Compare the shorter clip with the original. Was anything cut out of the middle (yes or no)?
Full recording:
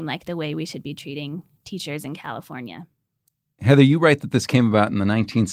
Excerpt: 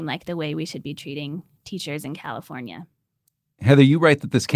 no